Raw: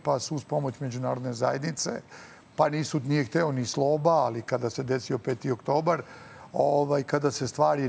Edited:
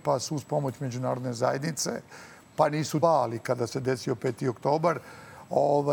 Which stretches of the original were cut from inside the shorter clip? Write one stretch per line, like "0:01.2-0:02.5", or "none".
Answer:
0:03.0-0:04.1